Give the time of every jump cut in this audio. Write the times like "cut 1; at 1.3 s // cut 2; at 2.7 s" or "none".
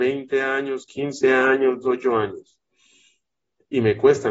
cut 1; at 1.8 s